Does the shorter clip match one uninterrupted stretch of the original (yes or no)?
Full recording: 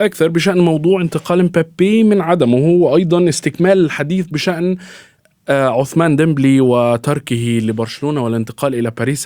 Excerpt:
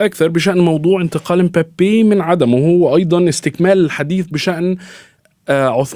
yes